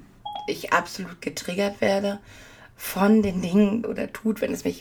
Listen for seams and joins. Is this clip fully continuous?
no; 1 cut; at 3.8 s

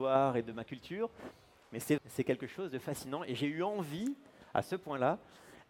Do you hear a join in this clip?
yes; 1 cut; at 2.0 s

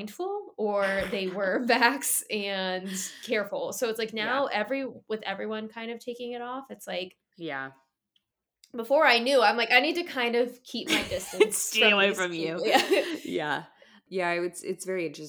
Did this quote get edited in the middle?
no; 0 cuts

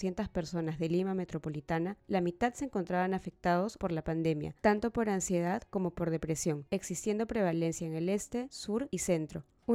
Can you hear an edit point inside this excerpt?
no; 0 cuts

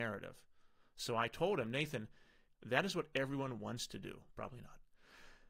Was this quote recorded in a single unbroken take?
no; 2 cuts; at 2.5 s, 4.3 s

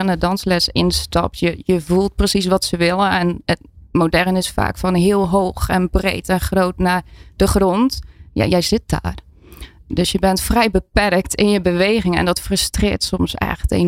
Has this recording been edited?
no; 0 cuts

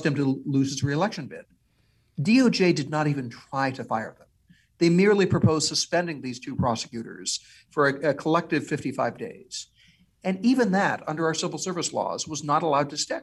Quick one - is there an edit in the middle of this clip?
no; 0 cuts

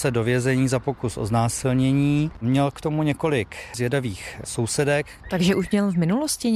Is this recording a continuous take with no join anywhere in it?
no; 2 cuts; at 2.4 s, 5.2 s

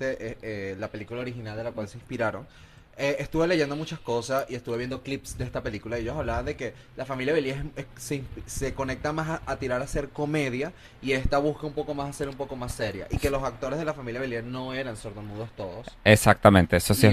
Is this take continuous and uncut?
yes; 0 cuts

